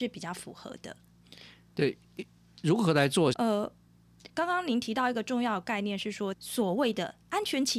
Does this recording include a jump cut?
yes; 2 cuts; at 3.3 s, 6.3 s

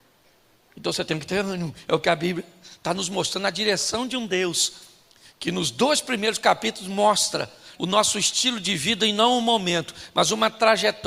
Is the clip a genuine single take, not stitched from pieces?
no; 1 cut; at 7.7 s

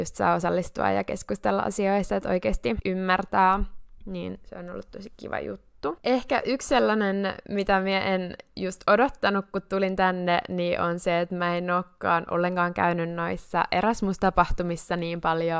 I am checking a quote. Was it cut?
no; 0 cuts

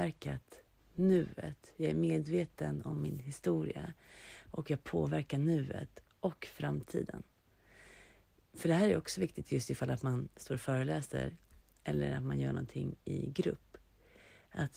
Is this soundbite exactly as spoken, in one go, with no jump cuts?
yes; 0 cuts

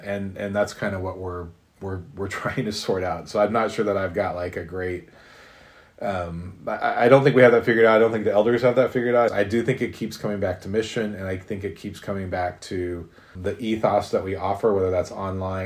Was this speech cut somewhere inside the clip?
yes; 2 cuts; at 9.3 s, 13.3 s

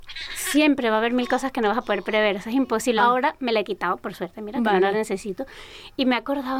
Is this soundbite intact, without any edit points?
no; 1 cut; at 3.0 s

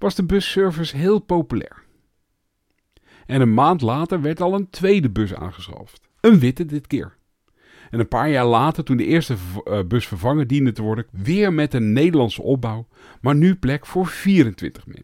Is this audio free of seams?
no; 1 cut; at 11.1 s

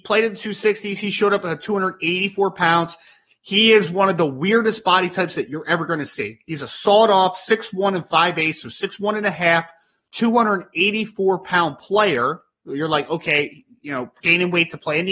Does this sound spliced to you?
no; 0 cuts

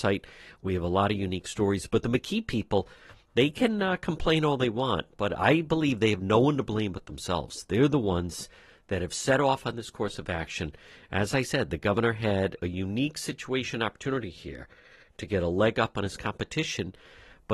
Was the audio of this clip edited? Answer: no; 0 cuts

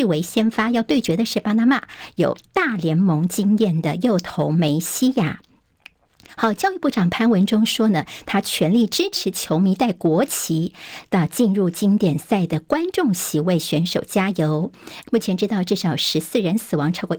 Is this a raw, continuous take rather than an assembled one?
no; 1 cut; at 15.0 s

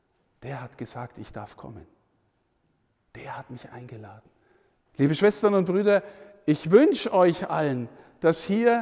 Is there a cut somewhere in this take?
yes; 1 cut; at 4.9 s

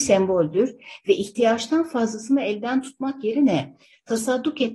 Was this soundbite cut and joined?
no; 0 cuts

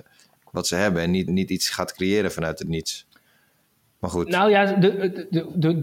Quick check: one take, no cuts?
no; 1 cut; at 1.3 s

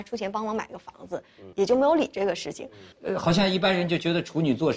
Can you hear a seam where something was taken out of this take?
yes; 2 cuts; at 1.5 s, 2.9 s

